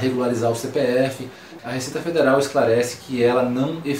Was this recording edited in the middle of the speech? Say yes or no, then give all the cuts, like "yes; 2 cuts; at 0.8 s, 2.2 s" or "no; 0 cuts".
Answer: yes; 1 cut; at 1.6 s